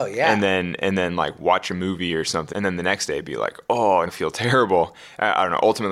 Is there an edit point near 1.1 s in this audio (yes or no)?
no